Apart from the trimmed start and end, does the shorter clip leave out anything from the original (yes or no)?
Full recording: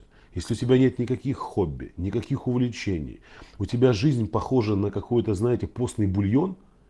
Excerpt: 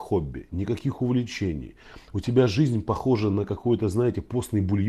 no